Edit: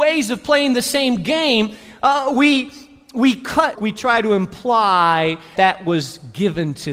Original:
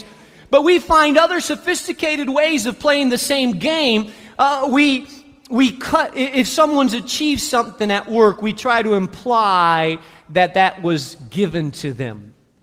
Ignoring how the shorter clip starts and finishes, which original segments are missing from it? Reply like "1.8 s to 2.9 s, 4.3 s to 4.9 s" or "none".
6.1 s to 8.4 s, 10.2 s to 10.5 s